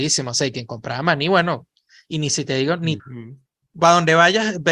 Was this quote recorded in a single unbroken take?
no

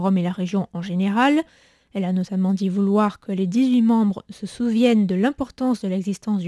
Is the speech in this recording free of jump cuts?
yes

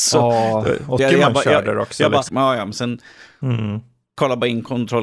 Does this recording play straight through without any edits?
no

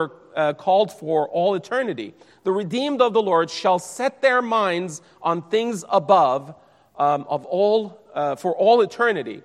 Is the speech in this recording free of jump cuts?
yes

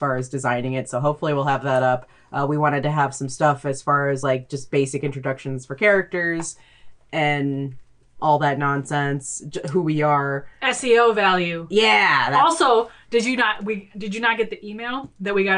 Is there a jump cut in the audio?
no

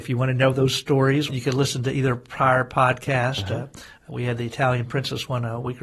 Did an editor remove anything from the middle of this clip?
yes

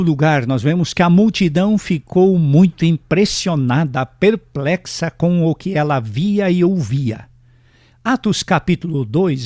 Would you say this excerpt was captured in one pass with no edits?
yes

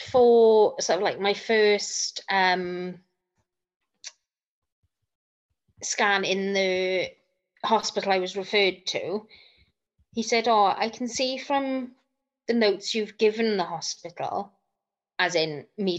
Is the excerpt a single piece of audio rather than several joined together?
yes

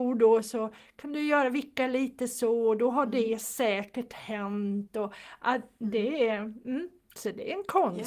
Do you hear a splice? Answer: no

